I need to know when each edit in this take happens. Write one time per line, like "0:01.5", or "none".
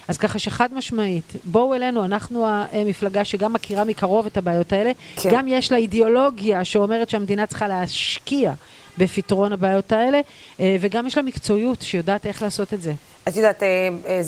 none